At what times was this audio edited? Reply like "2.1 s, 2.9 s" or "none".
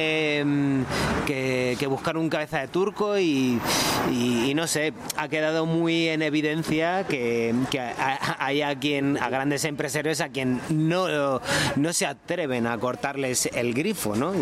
none